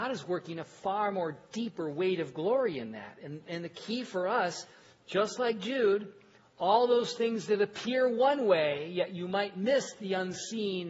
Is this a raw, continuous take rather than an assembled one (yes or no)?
yes